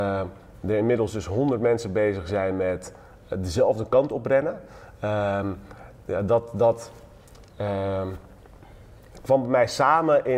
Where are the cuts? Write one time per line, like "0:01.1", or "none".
none